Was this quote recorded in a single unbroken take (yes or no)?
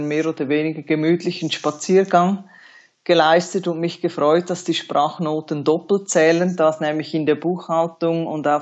yes